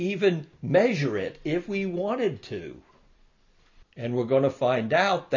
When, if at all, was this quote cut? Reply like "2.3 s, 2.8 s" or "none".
3.8 s